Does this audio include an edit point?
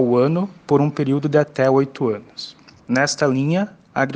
yes; 1 cut; at 2.8 s

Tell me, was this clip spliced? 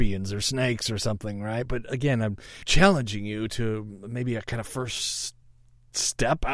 no; 0 cuts

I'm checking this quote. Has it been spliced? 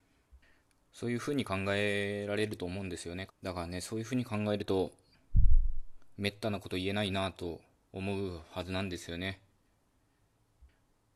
yes; 1 cut; at 3.3 s

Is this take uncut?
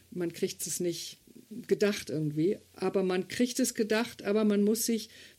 yes; 0 cuts

